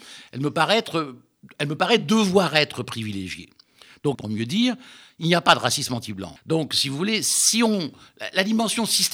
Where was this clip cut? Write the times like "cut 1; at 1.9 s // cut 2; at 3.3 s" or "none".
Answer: cut 1; at 4.1 s // cut 2; at 6.4 s